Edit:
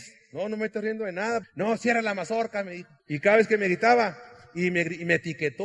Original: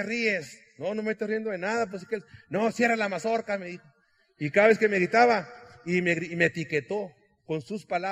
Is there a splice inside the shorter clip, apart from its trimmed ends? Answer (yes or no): yes